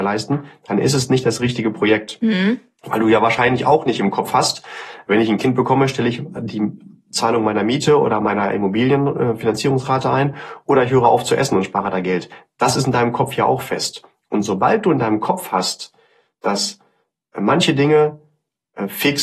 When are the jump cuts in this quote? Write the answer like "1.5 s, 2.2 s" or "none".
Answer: none